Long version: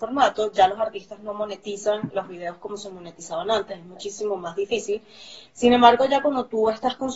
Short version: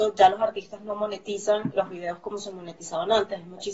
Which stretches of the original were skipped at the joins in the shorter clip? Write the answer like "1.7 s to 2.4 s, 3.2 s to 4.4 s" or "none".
none